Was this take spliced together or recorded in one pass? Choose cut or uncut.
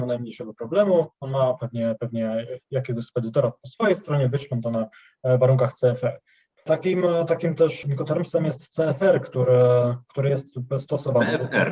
cut